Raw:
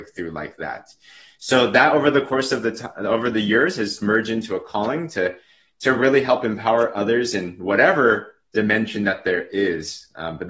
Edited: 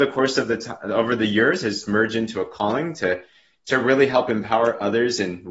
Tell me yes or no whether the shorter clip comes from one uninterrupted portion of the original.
yes